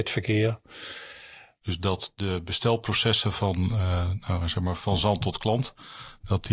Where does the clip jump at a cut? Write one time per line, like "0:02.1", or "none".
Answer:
0:01.6